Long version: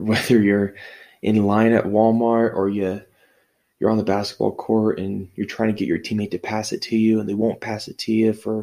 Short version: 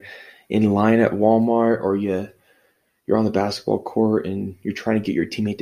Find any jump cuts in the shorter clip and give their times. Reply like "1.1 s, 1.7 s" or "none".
none